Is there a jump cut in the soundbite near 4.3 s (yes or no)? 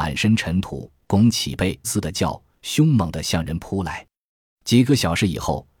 no